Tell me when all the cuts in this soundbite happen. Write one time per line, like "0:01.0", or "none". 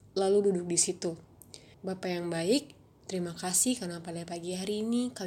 0:01.7